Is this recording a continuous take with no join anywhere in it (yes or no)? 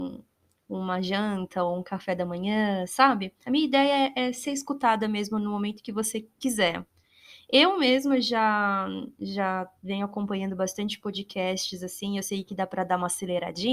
yes